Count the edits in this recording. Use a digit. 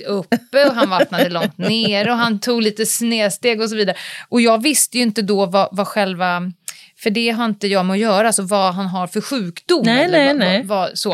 0